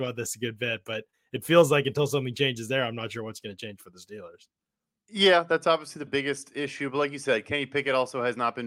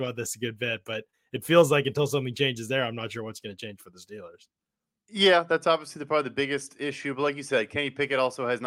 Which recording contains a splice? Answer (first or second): first